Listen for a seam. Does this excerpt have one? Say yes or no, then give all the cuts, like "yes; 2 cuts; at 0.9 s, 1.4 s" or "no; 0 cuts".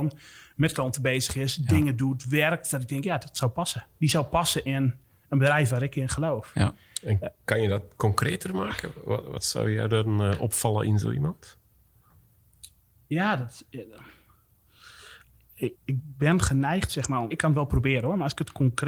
yes; 2 cuts; at 15.7 s, 17.3 s